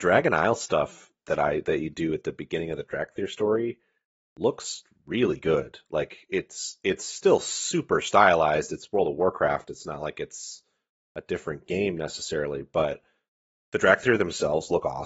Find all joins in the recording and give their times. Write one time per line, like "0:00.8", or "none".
none